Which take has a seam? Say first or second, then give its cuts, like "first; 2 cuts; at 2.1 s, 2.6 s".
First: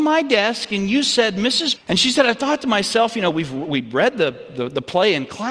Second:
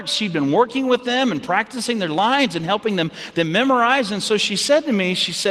first; 1 cut; at 1.7 s